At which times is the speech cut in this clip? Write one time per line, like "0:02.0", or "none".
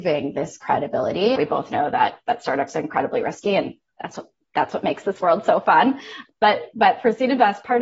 0:01.4